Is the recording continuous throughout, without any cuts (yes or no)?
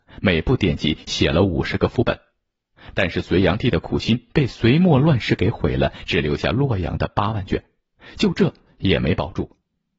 yes